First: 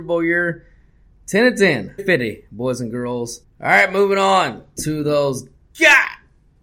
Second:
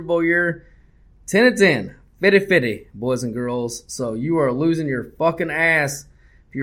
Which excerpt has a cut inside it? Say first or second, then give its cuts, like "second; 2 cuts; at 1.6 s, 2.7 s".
first; 2 cuts; at 2.0 s, 3.4 s